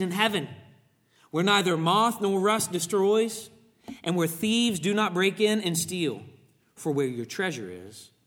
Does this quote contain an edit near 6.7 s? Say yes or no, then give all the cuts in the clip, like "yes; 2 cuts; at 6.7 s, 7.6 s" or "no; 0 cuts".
no; 0 cuts